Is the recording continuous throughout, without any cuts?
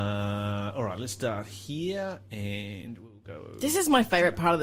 yes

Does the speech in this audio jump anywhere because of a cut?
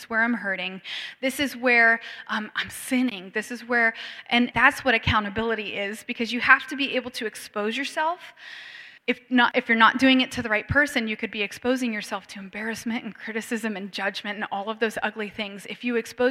yes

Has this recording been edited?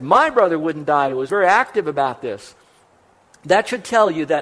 no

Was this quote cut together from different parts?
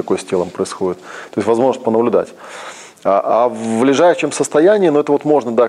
no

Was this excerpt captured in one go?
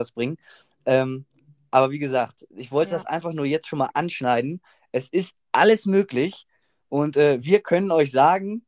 yes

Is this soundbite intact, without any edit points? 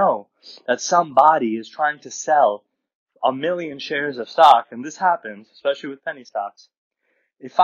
yes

